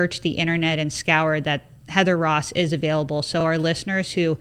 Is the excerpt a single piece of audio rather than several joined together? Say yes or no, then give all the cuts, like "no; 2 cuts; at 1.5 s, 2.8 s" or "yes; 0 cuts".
yes; 0 cuts